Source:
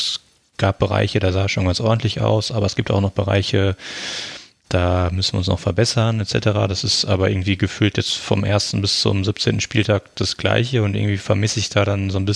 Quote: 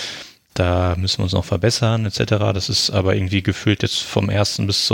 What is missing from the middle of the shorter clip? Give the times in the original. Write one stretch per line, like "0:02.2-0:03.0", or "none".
none